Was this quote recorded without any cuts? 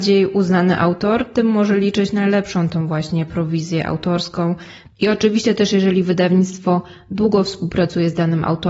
yes; 0 cuts

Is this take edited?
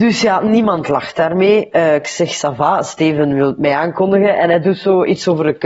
no; 0 cuts

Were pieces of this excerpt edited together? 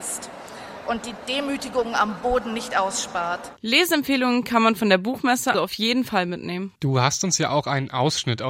yes; 2 cuts; at 5.5 s, 6.8 s

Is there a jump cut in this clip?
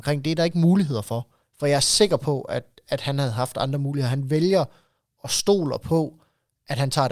yes; 1 cut; at 1.4 s

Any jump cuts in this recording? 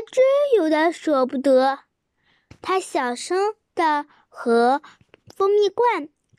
yes; 1 cut; at 2.5 s

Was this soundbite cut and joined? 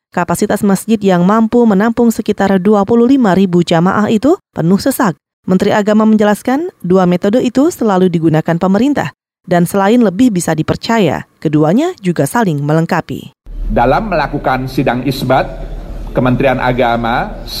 yes; 1 cut; at 5.3 s

